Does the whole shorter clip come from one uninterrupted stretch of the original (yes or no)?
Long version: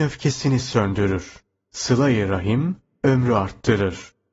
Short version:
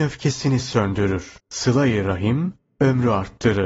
no